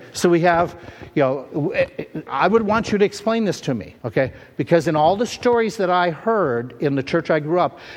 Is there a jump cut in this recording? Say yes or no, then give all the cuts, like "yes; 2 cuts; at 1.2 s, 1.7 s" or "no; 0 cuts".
yes; 2 cuts; at 2.3 s, 4.0 s